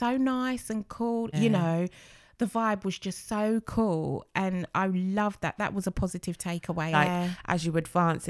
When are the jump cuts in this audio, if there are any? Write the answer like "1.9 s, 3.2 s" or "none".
1.3 s, 6.9 s

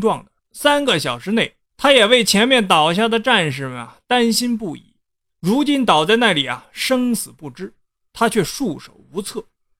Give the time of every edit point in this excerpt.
1.6 s, 5.3 s

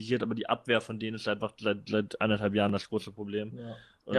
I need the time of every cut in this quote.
none

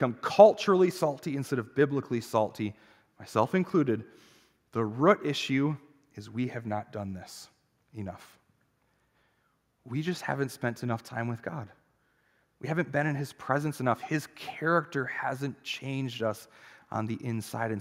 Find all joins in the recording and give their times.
none

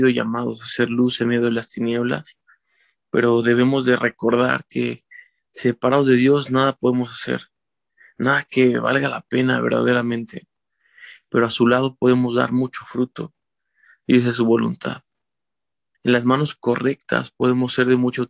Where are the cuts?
15.9 s

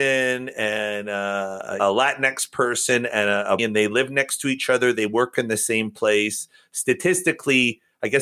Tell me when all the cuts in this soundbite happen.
1.8 s, 3.6 s

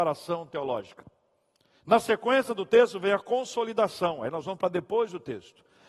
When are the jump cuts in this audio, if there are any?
none

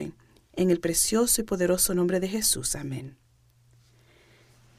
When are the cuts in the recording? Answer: none

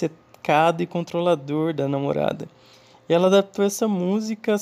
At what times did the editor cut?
none

